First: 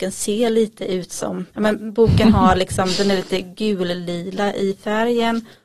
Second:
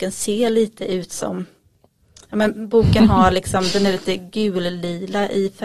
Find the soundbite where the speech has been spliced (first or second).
first